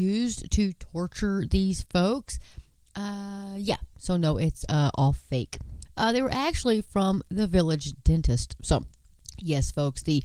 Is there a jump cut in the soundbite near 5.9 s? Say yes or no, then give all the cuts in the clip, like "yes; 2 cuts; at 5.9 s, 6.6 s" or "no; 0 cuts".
yes; 1 cut; at 5.9 s